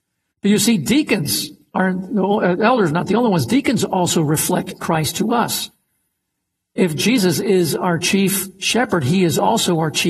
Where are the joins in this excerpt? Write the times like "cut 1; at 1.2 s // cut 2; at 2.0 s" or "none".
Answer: none